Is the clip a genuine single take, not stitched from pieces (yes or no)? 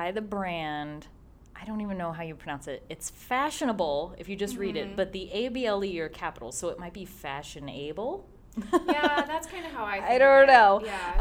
yes